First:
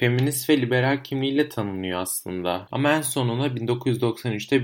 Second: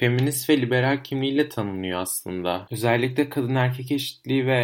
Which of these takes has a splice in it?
first; 1 cut; at 2.7 s

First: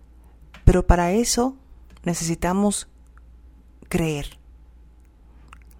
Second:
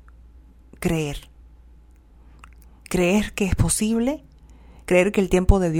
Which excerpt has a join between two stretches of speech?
second; 1 cut; at 2.9 s

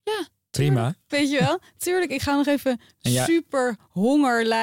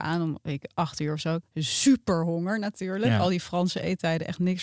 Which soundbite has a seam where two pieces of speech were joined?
first; 1 cut; at 1.1 s

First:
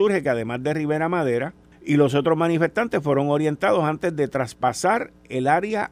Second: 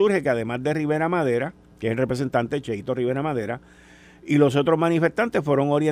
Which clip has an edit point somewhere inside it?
first; 1 cut; at 1.7 s

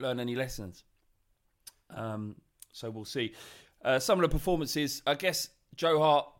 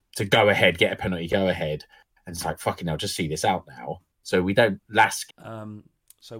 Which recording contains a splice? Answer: second; 2 cuts; at 4.1 s, 5.3 s

